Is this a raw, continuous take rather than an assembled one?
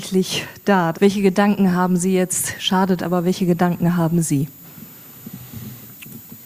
no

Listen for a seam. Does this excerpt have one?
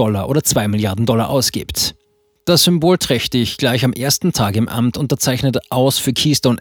no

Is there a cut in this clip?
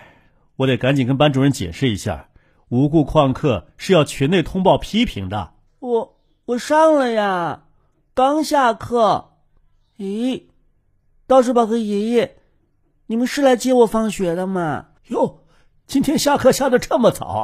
yes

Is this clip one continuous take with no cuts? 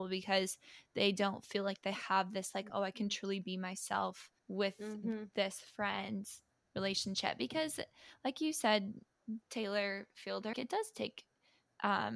no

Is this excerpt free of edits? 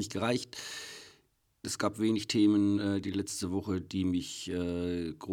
no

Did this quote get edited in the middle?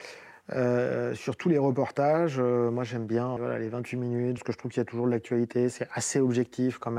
yes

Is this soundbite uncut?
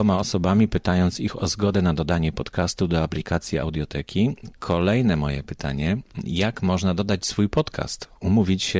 no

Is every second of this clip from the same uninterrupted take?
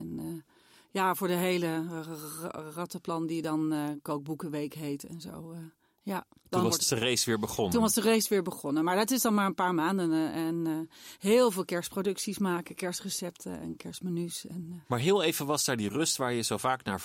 no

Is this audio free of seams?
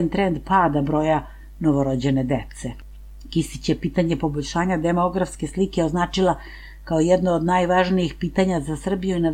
yes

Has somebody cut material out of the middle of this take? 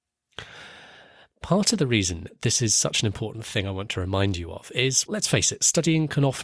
yes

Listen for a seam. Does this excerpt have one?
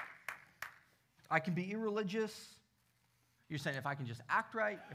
yes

